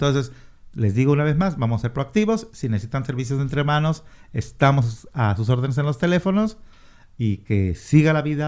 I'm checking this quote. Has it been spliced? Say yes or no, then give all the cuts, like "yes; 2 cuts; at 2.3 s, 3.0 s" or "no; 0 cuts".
no; 0 cuts